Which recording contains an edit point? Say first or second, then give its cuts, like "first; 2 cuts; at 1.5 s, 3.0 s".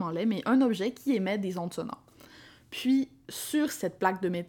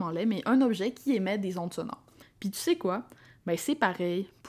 second; 1 cut; at 2.2 s